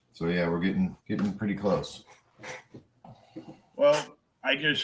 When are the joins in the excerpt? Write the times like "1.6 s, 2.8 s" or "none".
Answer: 1.0 s